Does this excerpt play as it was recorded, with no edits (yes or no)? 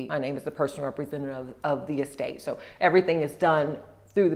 yes